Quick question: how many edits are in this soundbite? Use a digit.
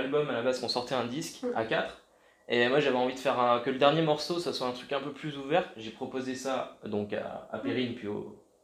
0